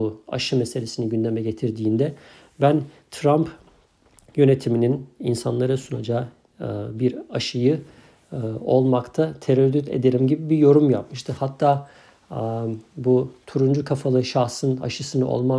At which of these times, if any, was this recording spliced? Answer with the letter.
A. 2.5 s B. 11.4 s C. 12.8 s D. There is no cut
D